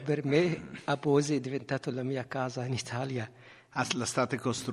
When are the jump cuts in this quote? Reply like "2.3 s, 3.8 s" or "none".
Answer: 3.7 s